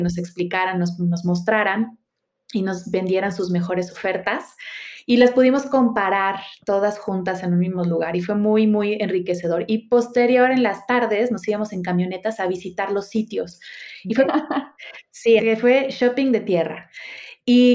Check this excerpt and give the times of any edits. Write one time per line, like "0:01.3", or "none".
0:14.3
0:15.4

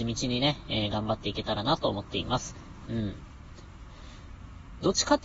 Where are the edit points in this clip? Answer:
0:02.9

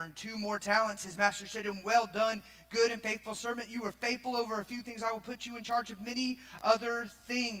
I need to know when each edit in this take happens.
none

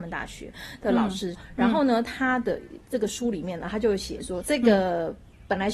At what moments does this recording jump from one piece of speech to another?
0:01.3
0:04.4

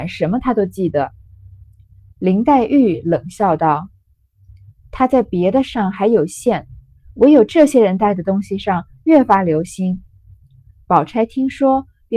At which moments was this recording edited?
none

